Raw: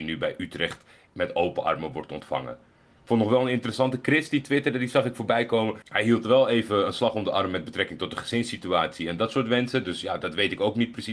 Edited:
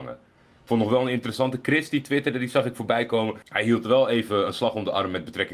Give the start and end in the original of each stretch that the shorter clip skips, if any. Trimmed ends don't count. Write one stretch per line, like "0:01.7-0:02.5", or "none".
none